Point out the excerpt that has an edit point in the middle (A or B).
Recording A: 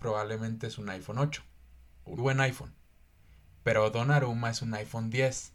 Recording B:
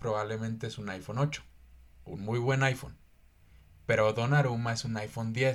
A